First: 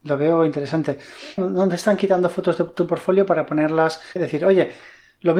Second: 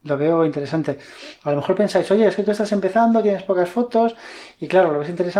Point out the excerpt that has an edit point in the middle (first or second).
first